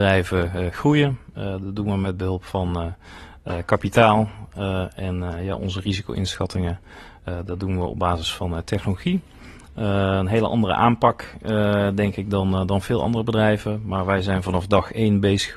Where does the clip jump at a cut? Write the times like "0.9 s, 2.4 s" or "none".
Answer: none